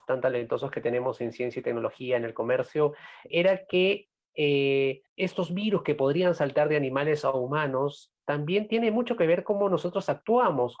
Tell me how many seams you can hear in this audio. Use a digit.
2